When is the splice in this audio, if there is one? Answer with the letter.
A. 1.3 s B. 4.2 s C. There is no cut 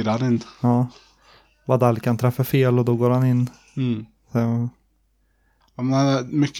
C